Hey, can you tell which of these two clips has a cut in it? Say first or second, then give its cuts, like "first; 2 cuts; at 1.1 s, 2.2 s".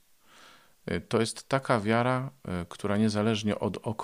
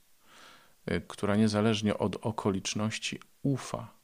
second; 1 cut; at 1.1 s